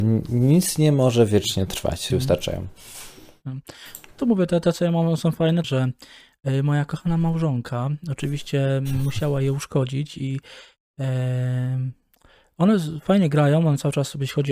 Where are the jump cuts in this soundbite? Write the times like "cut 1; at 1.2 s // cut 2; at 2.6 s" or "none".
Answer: cut 1; at 2.1 s // cut 2; at 5.6 s